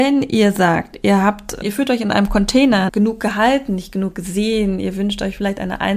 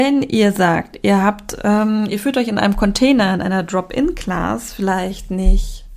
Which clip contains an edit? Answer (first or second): first